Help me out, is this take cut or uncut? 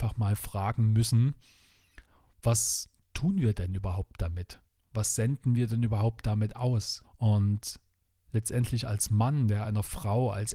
cut